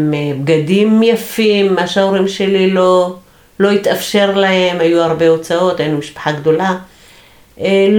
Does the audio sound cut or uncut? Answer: uncut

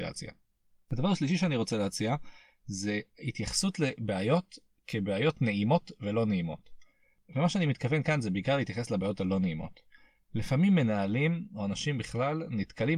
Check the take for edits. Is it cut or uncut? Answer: uncut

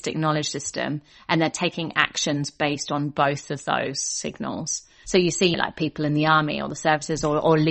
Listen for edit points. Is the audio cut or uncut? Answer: cut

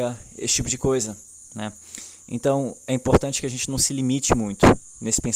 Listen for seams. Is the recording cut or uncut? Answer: uncut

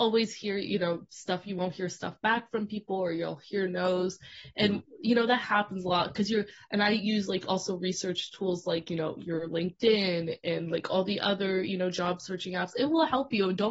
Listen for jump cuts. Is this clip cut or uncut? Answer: uncut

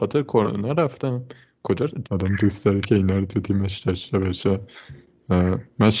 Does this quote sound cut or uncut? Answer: cut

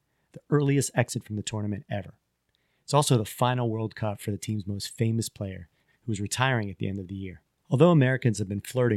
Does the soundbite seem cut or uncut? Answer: cut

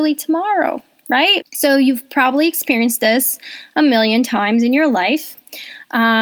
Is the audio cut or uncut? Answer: cut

